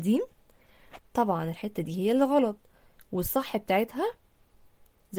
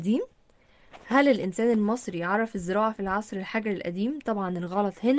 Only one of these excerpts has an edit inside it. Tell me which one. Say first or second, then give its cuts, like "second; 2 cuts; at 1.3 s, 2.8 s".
first; 1 cut; at 1.0 s